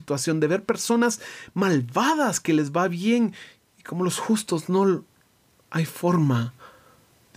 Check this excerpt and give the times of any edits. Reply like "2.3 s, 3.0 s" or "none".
none